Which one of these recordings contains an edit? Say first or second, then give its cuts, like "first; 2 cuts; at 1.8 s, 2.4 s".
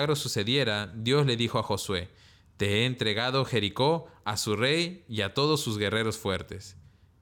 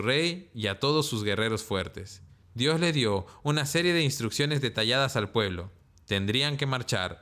second; 1 cut; at 2.4 s